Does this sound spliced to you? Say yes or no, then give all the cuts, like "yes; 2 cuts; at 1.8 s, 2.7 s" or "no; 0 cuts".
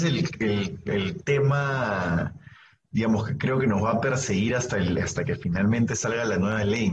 no; 0 cuts